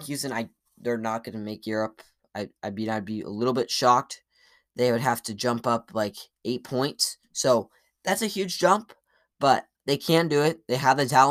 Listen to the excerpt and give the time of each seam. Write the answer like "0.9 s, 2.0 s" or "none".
9.7 s